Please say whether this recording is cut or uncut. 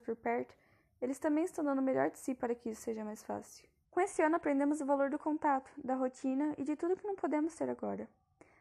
cut